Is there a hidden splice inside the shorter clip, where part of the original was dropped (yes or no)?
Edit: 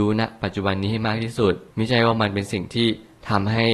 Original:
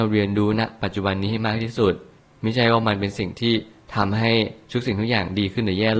yes